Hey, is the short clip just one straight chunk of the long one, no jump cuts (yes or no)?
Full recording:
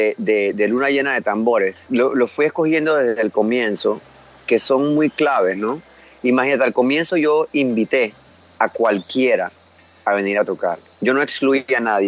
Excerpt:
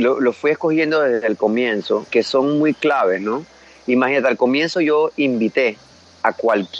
no